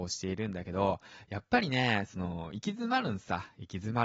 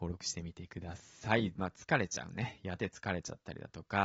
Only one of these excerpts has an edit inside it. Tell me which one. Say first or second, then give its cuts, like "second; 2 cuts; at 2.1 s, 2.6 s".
second; 2 cuts; at 1.6 s, 2.8 s